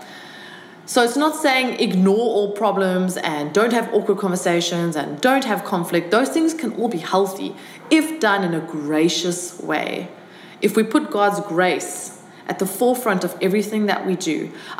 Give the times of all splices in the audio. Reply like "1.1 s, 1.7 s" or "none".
none